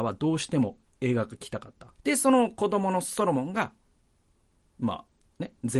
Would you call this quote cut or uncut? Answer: cut